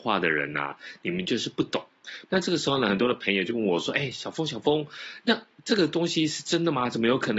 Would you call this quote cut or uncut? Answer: cut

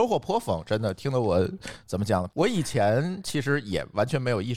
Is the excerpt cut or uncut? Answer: cut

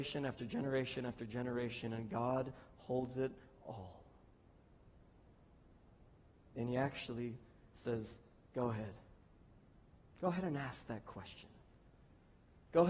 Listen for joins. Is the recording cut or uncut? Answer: uncut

